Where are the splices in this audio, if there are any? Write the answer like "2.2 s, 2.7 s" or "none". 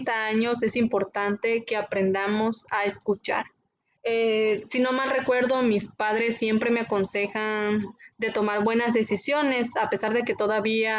4.0 s